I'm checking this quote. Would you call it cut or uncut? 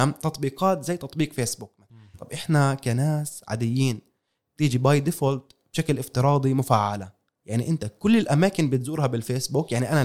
cut